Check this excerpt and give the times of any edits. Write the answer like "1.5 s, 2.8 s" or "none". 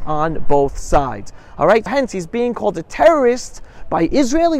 1.9 s